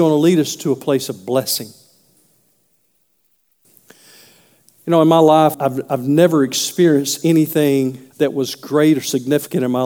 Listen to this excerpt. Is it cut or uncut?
cut